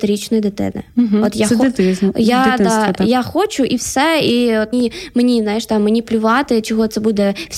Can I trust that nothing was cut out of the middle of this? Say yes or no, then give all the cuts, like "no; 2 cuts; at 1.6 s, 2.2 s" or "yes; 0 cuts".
no; 1 cut; at 4.7 s